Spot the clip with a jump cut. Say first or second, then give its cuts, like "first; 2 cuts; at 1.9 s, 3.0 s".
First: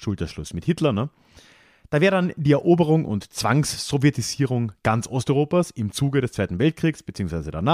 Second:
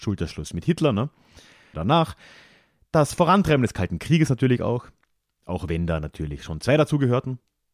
second; 1 cut; at 1.7 s